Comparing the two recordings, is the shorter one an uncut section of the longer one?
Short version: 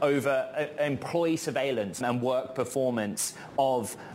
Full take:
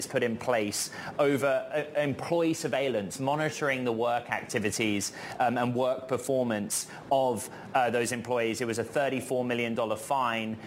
no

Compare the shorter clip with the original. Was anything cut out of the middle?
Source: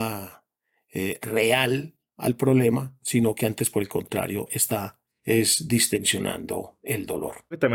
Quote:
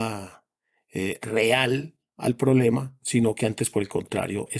no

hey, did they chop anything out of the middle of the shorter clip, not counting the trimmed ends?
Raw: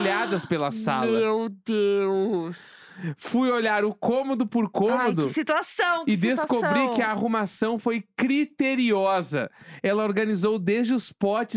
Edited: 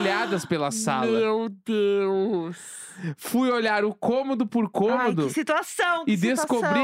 no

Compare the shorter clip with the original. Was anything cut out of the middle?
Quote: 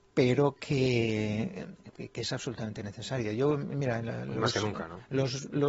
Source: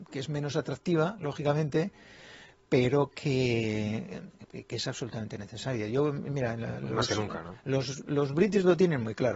no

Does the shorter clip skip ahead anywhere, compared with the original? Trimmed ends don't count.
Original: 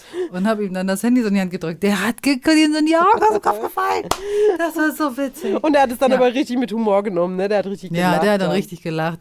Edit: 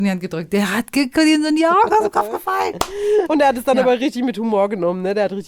yes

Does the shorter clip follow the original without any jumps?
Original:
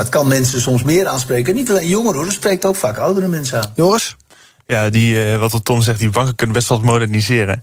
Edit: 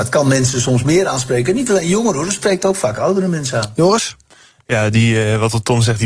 yes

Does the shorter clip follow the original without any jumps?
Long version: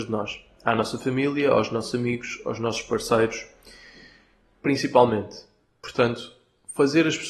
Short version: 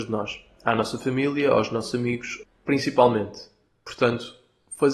no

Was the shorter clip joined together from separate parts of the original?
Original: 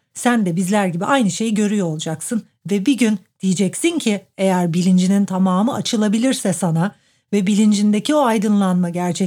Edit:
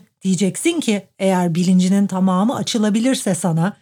no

